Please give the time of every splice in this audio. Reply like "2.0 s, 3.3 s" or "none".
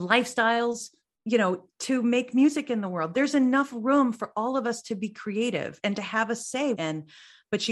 6.7 s